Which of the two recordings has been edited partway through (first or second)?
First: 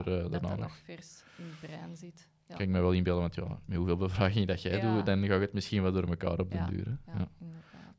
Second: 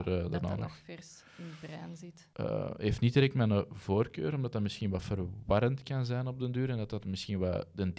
second